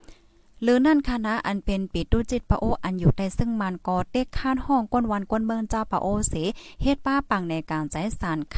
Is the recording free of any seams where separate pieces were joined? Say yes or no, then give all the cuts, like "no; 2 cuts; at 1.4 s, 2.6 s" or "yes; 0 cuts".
yes; 0 cuts